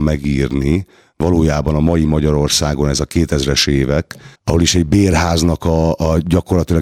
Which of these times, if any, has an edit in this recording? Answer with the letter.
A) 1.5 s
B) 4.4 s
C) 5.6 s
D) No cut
B